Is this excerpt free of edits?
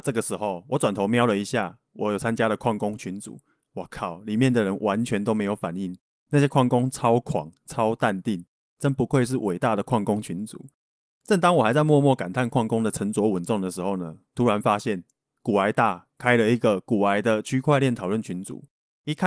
yes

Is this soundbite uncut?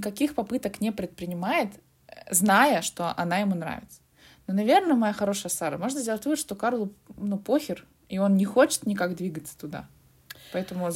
yes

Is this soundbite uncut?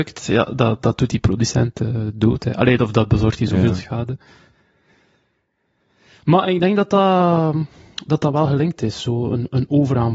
yes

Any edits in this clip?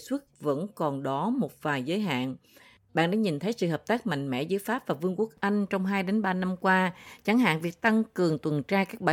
no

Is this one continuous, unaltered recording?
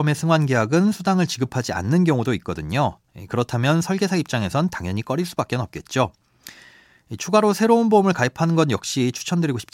yes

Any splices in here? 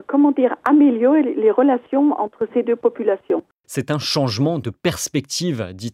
yes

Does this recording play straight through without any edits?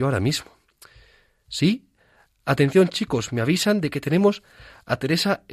yes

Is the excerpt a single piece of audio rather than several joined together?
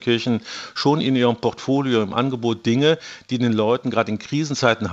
yes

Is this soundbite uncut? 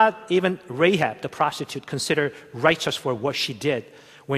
yes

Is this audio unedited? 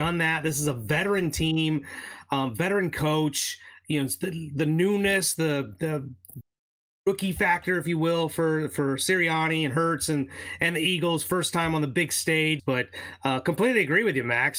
no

